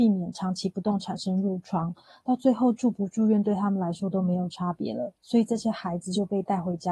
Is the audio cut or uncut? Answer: uncut